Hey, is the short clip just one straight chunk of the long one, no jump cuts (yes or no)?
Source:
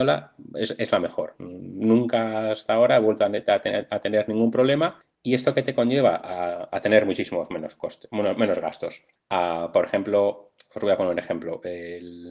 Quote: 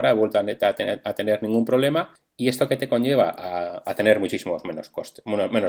yes